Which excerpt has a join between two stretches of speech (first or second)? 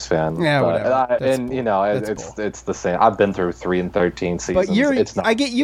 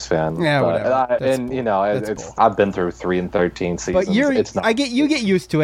second